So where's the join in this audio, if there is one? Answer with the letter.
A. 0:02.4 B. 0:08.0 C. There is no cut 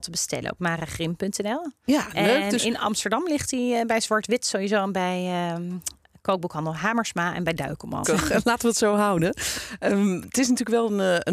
B